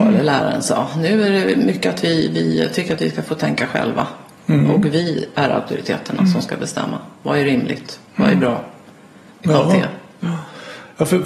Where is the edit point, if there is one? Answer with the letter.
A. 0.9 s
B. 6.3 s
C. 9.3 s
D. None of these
C